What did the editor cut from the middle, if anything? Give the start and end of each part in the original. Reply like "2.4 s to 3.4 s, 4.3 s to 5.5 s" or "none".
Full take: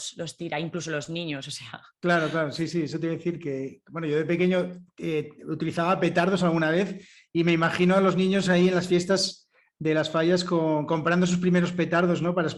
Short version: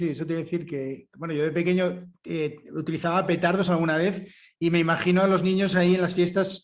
none